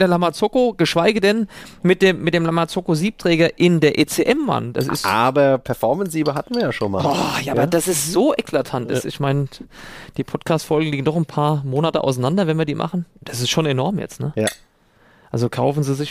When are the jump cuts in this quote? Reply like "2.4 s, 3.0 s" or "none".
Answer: none